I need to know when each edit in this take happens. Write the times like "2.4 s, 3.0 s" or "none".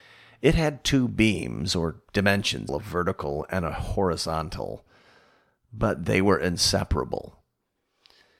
2.7 s